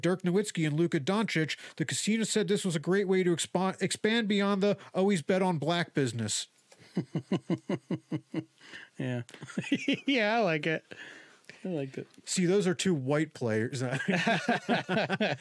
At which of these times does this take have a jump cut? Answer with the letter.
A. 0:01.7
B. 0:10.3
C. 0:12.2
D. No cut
D